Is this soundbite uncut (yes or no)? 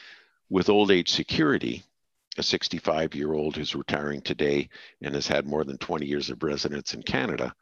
yes